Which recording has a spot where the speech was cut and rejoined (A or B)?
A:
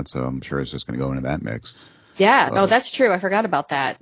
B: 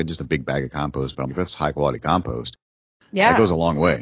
B